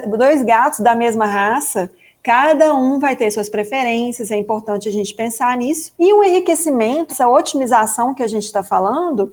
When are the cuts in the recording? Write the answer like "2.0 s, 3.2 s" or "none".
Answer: 5.9 s, 7.1 s